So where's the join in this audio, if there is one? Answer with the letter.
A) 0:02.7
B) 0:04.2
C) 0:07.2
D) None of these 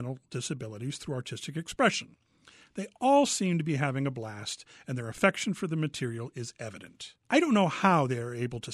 C